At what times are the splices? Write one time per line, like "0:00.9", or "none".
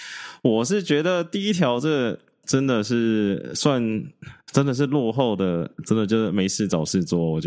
none